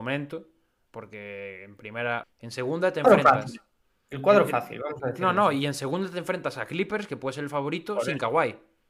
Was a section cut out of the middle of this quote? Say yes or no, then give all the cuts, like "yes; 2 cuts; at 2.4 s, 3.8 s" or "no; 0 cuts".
yes; 1 cut; at 2.2 s